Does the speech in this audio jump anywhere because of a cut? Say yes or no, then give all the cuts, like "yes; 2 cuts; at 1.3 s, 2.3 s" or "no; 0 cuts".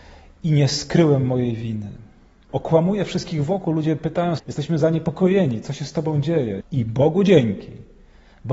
yes; 3 cuts; at 2.5 s, 4.4 s, 6.6 s